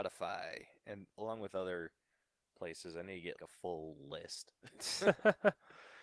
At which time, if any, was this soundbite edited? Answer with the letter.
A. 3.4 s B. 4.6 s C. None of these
A